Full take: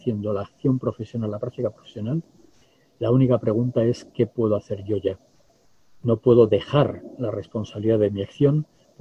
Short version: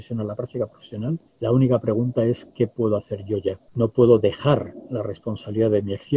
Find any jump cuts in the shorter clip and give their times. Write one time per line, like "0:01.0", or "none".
0:01.3
0:03.7